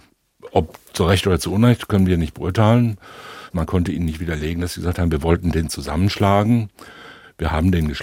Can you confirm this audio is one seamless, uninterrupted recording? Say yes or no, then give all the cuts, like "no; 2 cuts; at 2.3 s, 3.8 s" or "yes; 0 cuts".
no; 1 cut; at 3.5 s